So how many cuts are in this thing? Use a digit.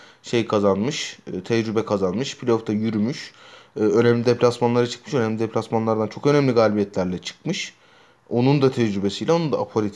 1